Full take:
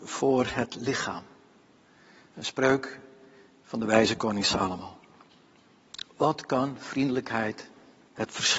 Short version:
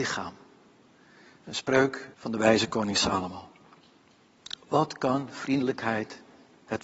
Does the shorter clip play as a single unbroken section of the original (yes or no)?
no